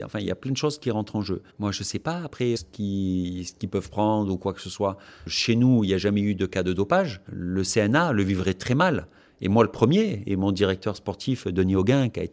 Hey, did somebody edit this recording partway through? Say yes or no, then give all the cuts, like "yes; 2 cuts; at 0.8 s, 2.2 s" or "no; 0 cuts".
yes; 3 cuts; at 1.5 s, 2.5 s, 7.3 s